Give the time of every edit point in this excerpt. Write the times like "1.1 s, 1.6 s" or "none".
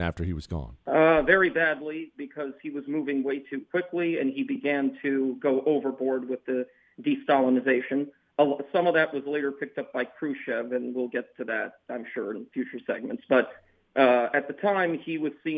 none